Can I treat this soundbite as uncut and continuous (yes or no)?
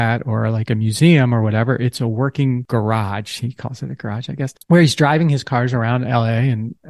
yes